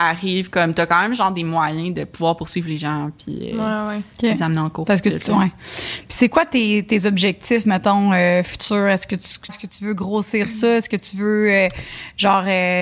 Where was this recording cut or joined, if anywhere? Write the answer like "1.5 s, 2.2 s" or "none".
9.5 s